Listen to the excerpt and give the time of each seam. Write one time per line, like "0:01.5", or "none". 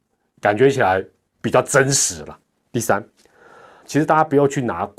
0:03.8